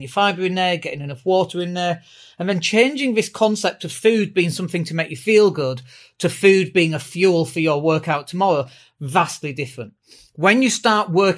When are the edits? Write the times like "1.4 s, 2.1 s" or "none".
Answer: none